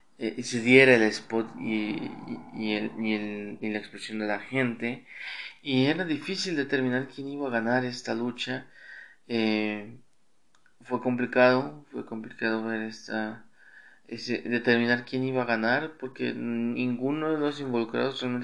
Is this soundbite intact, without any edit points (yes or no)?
yes